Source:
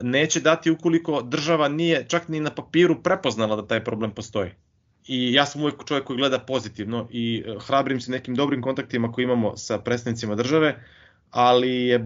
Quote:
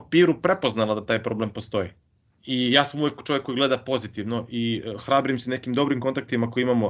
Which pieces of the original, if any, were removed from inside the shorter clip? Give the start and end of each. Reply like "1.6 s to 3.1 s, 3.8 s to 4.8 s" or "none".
none